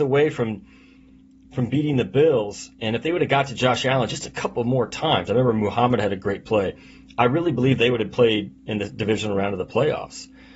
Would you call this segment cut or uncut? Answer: uncut